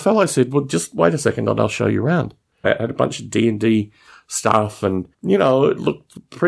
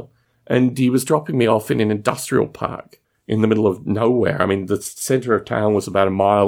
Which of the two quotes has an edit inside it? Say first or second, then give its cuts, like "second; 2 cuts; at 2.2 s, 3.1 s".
first; 2 cuts; at 2.6 s, 5.1 s